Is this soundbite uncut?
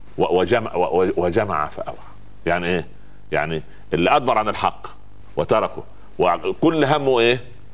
yes; 0 cuts

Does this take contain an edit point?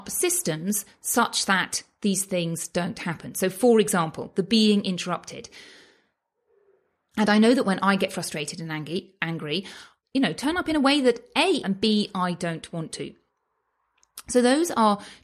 yes; 3 cuts; at 7.1 s, 10.0 s, 11.6 s

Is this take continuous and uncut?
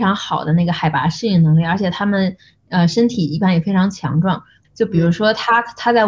no; 1 cut; at 4.6 s

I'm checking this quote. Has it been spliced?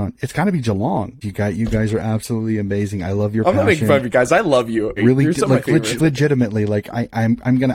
yes; 3 cuts; at 1.2 s, 5.0 s, 6.0 s

